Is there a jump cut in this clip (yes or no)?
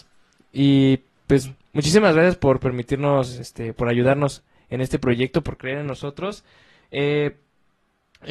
no